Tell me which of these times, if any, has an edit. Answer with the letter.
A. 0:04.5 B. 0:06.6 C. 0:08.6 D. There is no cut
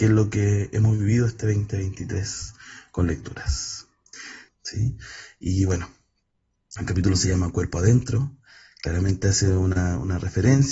A